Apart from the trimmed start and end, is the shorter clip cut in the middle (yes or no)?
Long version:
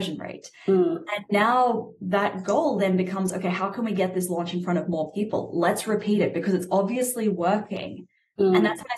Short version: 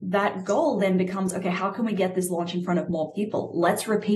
no